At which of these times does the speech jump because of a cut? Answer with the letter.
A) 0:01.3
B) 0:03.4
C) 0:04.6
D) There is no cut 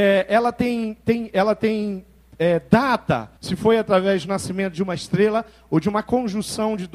B